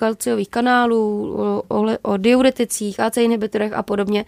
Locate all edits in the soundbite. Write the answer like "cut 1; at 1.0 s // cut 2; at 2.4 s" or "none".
none

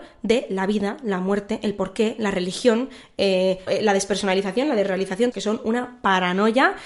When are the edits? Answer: cut 1; at 3.7 s // cut 2; at 5.3 s

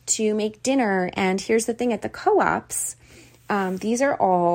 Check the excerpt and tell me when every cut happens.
none

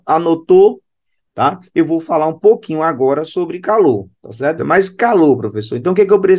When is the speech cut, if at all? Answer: cut 1; at 4.6 s

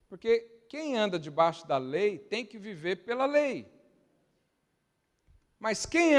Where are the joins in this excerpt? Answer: none

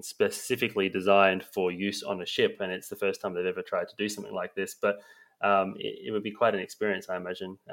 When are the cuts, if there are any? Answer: none

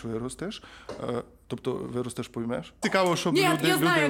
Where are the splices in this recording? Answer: cut 1; at 2.8 s

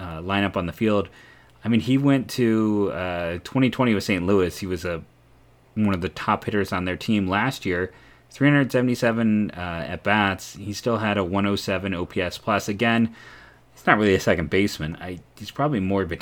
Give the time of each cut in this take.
none

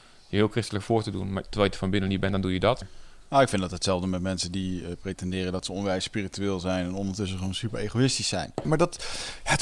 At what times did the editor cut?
cut 1; at 2.8 s // cut 2; at 8.6 s

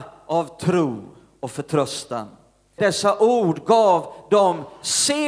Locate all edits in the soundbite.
cut 1; at 2.8 s

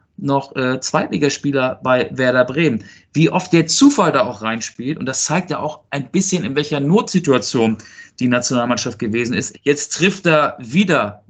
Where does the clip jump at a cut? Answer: cut 1; at 9.5 s

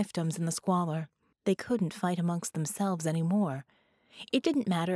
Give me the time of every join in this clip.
cut 1; at 1.3 s

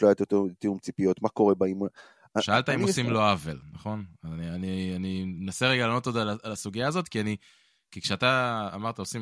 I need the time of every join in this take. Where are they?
none

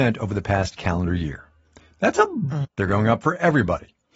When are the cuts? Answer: cut 1; at 2.6 s

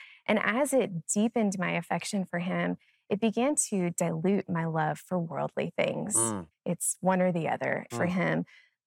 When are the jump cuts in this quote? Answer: cut 1; at 6.5 s // cut 2; at 7.9 s

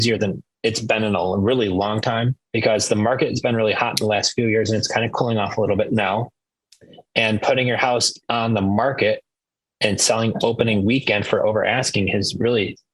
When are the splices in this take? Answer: cut 1; at 2.4 s

